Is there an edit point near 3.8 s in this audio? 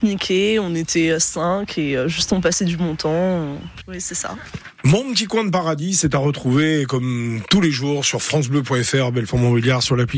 yes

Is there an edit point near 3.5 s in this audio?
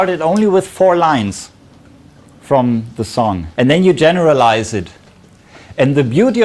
yes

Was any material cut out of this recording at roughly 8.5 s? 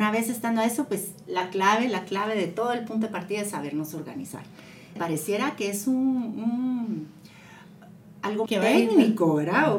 yes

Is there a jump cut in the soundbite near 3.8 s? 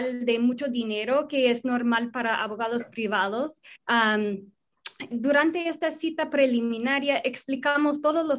yes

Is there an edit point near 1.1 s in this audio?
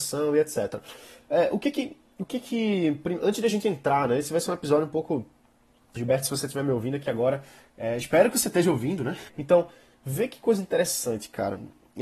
no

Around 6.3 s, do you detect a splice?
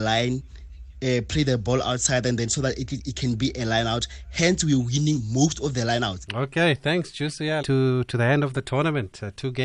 yes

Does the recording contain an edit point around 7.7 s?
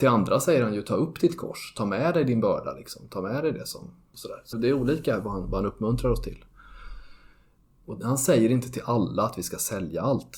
yes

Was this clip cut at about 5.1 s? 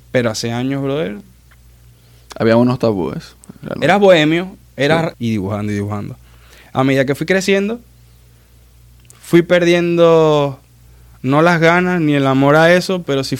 yes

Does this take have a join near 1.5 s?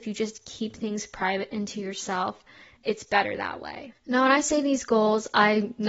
no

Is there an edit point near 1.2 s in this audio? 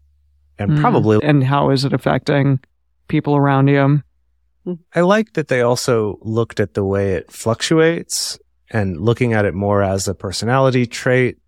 yes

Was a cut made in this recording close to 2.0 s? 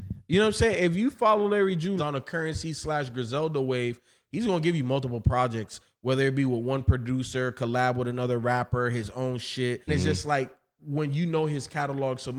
yes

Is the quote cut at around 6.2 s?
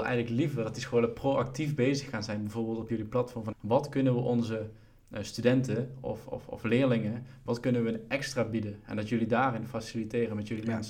no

